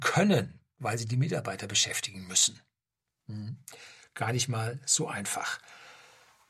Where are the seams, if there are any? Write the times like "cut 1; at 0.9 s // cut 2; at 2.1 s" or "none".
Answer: none